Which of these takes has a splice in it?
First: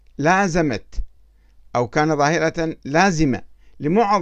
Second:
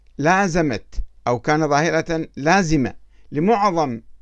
second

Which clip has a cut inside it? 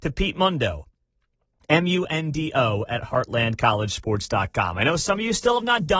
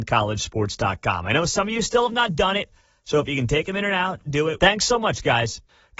second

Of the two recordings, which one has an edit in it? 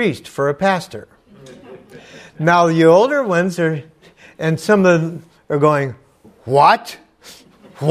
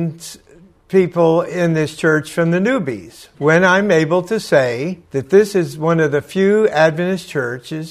second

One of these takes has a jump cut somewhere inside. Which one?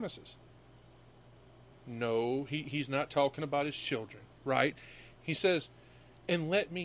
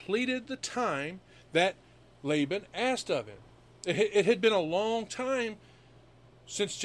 first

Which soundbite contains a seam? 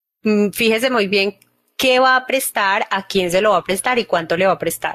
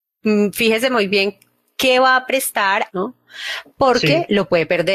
second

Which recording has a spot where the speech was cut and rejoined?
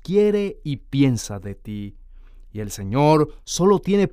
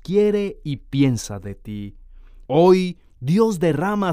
second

